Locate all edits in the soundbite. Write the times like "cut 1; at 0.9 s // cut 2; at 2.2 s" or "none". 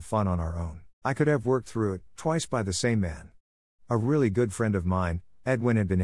cut 1; at 1.0 s // cut 2; at 2.1 s